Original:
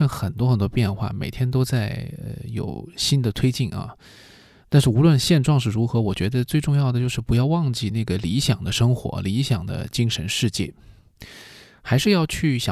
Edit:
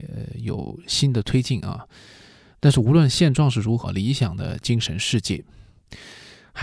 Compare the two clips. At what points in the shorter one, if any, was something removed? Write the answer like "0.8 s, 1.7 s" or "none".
3.8 s